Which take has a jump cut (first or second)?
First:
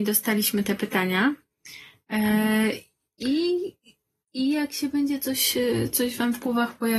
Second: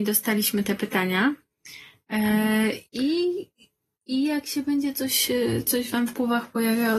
second